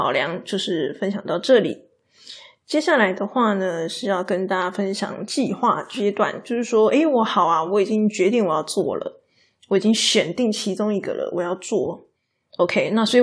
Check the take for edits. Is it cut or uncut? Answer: uncut